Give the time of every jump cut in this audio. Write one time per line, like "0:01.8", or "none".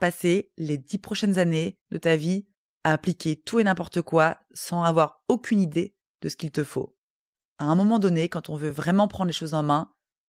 none